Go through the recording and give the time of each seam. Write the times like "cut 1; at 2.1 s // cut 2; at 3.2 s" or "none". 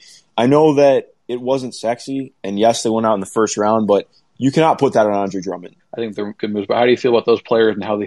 cut 1; at 5.8 s